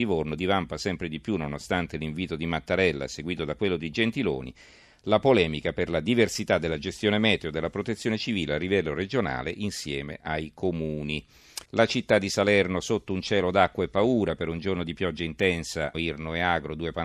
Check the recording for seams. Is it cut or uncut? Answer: cut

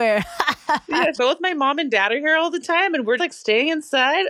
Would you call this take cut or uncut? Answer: cut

